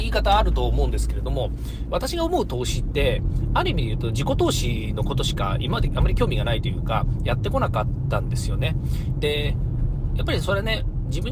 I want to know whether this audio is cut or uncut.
uncut